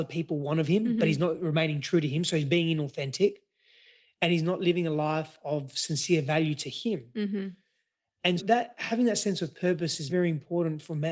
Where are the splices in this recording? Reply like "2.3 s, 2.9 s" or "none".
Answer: 8.4 s, 10.1 s